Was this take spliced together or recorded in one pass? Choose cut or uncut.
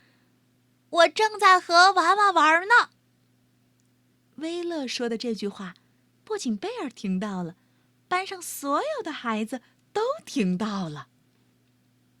uncut